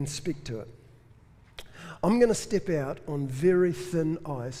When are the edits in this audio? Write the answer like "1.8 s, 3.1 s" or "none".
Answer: none